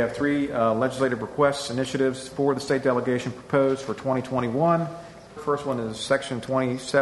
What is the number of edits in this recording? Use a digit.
1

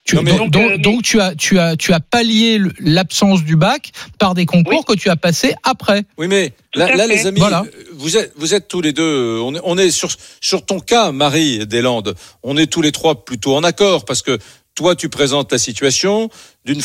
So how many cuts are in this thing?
0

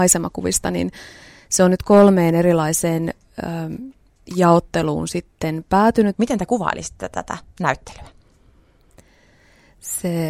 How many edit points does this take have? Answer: 2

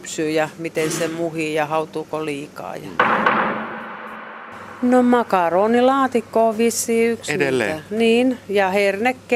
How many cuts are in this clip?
0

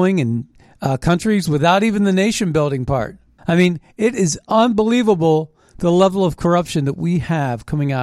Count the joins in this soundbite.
1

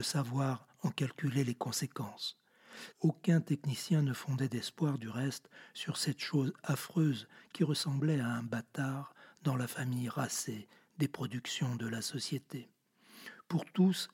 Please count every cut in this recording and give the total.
1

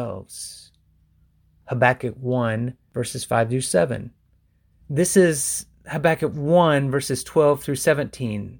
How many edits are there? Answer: 1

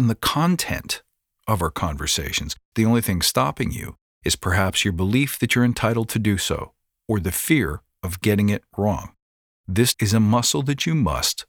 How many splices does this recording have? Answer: 2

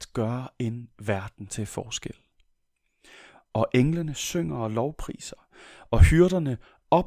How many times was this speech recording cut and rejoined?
0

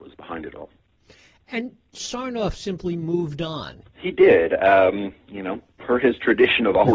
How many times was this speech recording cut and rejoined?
1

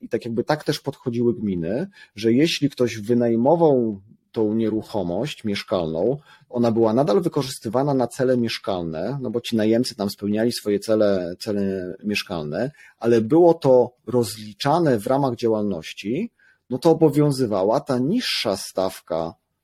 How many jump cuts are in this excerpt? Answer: 0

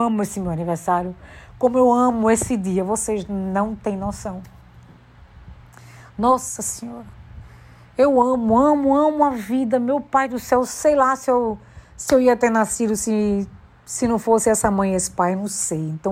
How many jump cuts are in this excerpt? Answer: 0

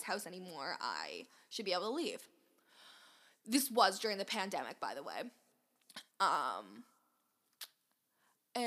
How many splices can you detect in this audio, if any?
1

